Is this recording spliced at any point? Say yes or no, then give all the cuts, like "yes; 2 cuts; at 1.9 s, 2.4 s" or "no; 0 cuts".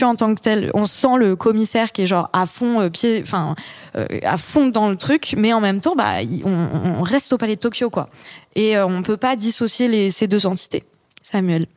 no; 0 cuts